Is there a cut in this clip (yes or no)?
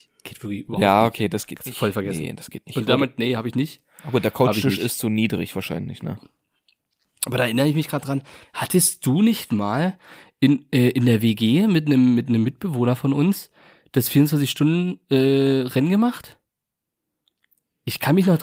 no